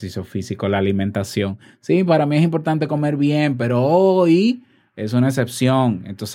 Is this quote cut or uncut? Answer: uncut